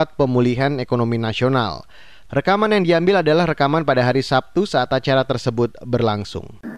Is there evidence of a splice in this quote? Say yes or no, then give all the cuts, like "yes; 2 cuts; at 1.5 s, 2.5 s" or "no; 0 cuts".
yes; 1 cut; at 2.3 s